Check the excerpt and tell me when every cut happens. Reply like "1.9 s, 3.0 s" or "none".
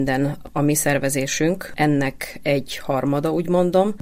none

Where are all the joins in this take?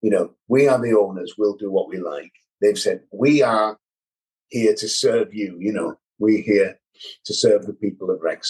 3.1 s

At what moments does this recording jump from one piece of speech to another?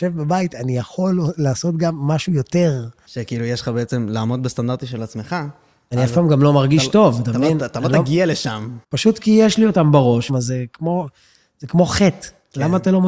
3.1 s, 8.8 s, 10.3 s

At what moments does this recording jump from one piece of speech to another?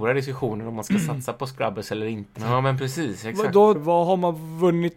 2.4 s, 3.7 s

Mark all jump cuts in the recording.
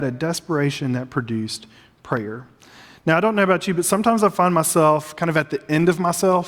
none

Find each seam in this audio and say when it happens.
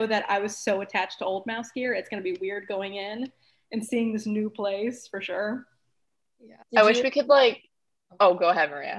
6.6 s

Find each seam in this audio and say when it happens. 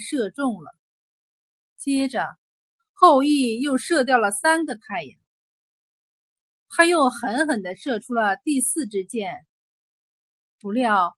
none

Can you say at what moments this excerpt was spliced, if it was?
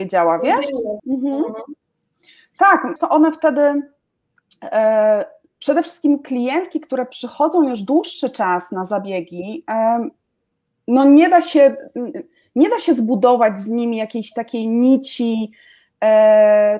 1.0 s, 3.0 s

